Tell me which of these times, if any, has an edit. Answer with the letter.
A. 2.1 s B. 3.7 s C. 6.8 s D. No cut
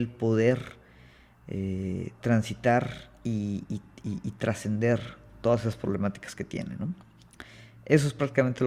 D